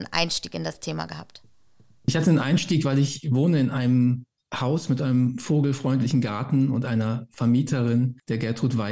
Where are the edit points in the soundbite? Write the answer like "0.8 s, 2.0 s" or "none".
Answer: none